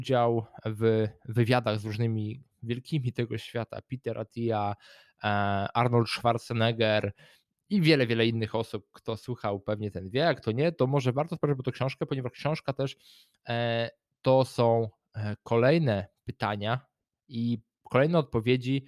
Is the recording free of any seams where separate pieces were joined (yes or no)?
yes